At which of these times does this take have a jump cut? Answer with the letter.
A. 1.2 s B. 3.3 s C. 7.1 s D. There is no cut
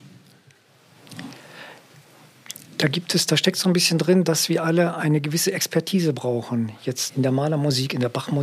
C